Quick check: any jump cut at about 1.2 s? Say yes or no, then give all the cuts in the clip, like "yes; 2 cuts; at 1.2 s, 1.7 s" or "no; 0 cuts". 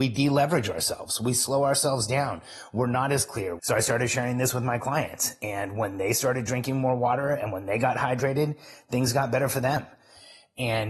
no; 1 cut; at 3.6 s